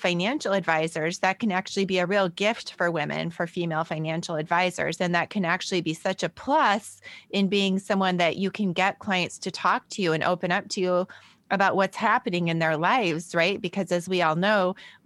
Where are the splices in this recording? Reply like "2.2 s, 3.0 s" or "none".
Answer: 5.0 s